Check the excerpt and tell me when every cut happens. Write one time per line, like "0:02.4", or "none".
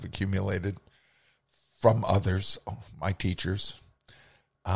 none